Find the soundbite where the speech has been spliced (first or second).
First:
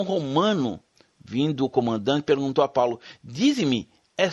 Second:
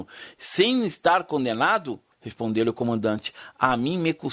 second